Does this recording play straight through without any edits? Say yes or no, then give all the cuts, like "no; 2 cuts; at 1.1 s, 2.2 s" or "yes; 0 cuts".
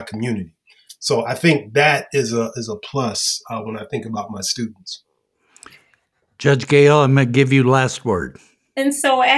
yes; 0 cuts